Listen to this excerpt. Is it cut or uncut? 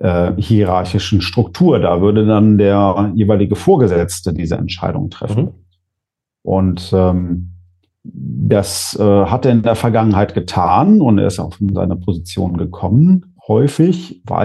cut